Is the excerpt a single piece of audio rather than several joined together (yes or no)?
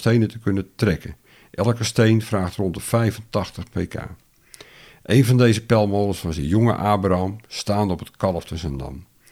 yes